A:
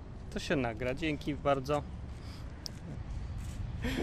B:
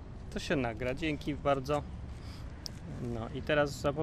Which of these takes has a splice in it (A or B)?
A